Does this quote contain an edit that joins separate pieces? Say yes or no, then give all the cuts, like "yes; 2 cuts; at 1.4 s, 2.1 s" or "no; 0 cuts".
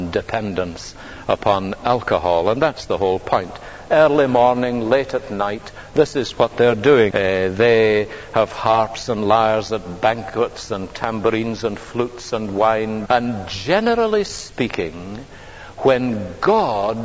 yes; 2 cuts; at 7.1 s, 13.1 s